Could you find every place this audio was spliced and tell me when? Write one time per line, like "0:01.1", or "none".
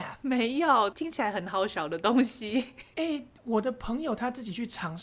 0:00.9